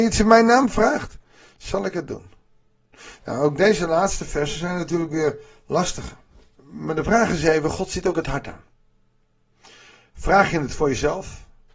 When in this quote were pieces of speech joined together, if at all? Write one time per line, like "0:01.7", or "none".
0:06.5